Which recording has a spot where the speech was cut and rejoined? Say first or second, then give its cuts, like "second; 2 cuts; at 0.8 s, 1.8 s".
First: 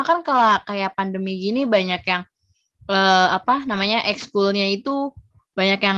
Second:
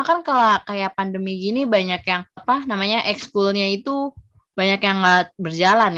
second; 1 cut; at 2.4 s